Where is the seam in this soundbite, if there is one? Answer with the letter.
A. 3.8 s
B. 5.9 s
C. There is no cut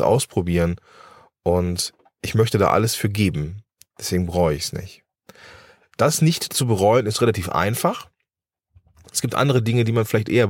C